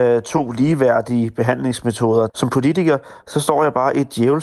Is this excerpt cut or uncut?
cut